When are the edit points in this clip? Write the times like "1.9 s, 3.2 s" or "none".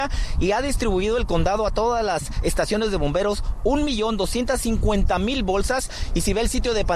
none